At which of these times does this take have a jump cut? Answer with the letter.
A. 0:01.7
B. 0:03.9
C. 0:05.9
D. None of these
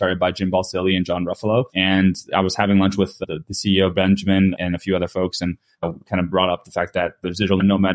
A